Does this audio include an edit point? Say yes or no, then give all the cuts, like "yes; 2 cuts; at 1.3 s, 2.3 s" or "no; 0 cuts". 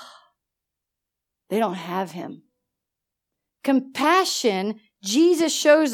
no; 0 cuts